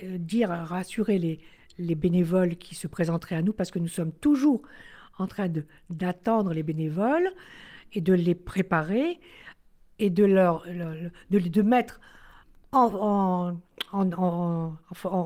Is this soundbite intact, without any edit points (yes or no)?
yes